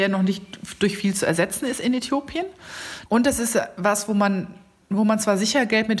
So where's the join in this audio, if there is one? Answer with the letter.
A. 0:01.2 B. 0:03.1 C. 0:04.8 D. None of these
B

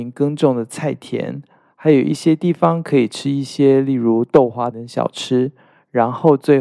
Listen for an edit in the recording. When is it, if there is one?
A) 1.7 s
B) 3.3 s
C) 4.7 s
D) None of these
C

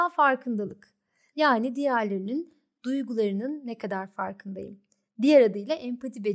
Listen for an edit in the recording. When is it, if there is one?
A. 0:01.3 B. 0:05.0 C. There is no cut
A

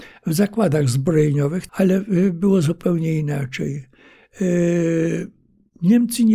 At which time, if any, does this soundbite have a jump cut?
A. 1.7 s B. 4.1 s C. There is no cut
A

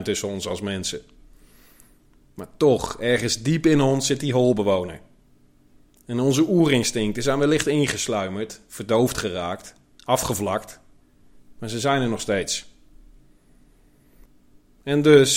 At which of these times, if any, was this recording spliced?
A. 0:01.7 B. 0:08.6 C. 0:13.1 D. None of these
D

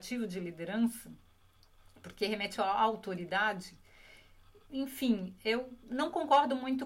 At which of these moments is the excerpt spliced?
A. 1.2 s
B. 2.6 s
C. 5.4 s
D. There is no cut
B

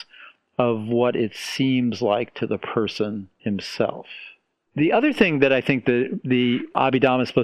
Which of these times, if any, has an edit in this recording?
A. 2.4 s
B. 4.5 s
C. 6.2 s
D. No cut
D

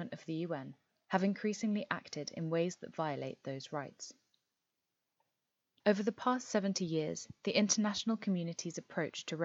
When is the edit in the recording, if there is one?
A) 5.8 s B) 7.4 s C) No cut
A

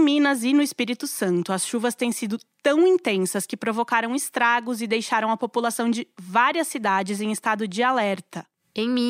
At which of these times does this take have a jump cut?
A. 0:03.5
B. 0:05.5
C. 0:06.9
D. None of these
D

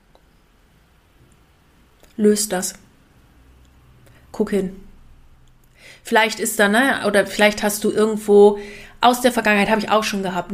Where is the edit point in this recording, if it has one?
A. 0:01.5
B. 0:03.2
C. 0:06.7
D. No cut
D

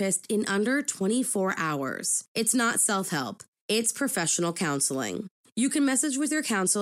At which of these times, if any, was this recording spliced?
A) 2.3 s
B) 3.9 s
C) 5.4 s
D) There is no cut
D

